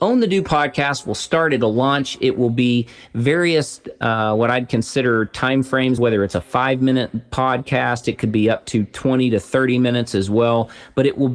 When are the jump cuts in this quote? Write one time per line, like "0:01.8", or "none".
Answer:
none